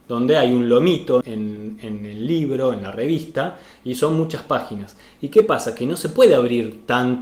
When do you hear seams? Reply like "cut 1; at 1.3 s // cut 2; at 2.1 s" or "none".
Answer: cut 1; at 1.2 s